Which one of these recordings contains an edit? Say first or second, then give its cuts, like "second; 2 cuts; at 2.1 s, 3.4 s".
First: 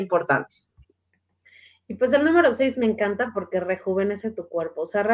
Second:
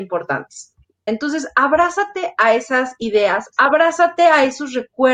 second; 2 cuts; at 1.1 s, 3.5 s